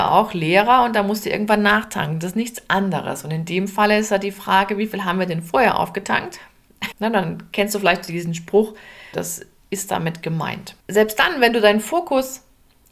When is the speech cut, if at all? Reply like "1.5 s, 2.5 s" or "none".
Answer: 6.9 s, 9.1 s, 10.8 s